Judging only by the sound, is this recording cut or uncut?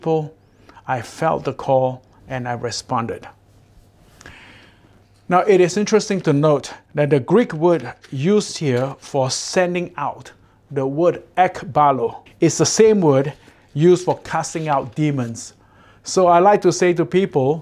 cut